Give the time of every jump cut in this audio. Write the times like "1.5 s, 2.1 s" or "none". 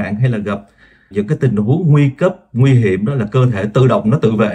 1.1 s

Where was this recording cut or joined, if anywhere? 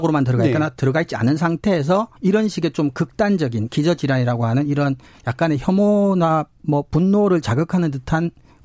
2.2 s

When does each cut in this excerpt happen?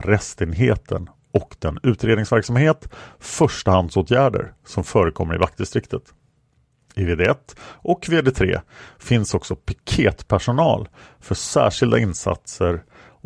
none

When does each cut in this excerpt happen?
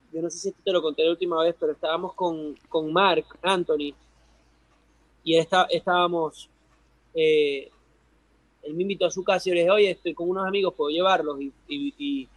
none

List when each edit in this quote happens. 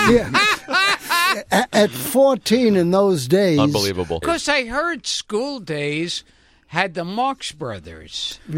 4.2 s

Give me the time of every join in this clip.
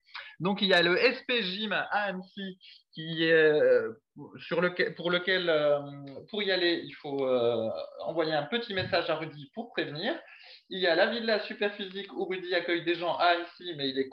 none

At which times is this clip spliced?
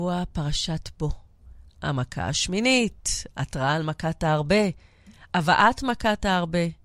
1.7 s

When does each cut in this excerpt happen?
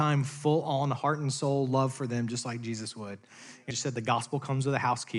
3.7 s

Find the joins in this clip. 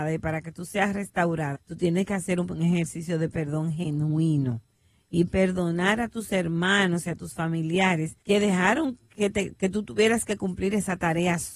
1.5 s, 8.2 s

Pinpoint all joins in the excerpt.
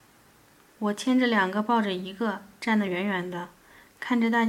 none

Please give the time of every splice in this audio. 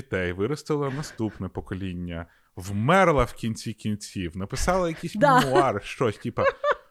none

